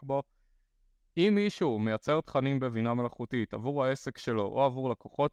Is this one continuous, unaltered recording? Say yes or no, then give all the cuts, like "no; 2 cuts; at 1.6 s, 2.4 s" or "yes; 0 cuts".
yes; 0 cuts